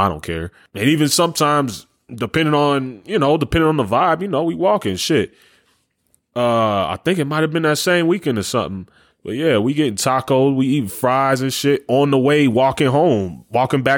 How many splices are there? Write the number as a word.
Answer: zero